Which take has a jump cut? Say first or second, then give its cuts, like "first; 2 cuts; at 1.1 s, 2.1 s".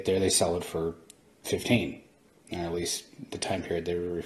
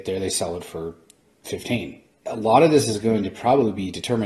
second; 1 cut; at 2.2 s